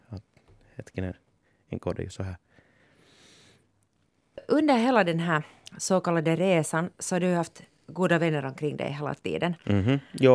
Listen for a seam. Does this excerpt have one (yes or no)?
no